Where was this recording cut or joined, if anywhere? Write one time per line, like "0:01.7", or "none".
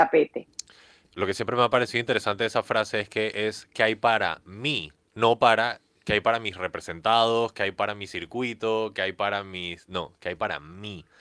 0:01.1